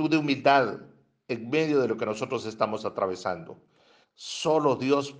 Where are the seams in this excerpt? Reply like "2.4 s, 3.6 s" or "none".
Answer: 4.0 s